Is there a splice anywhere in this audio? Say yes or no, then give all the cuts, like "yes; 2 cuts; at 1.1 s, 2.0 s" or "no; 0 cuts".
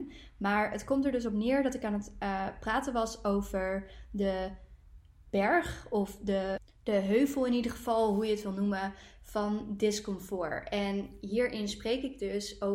no; 0 cuts